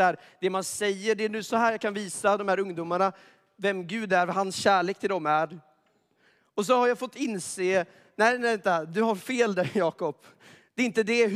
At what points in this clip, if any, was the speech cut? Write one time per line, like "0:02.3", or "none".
none